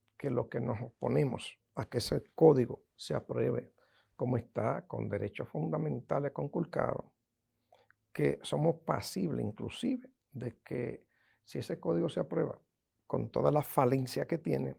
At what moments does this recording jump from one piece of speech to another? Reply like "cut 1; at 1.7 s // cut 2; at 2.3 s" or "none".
none

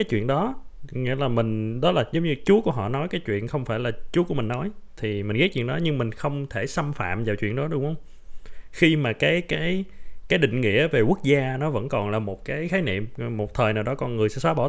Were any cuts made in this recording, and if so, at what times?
none

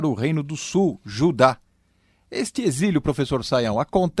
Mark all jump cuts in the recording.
none

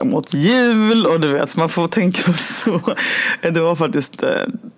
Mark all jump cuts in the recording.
none

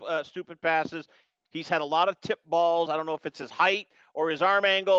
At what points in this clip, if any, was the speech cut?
none

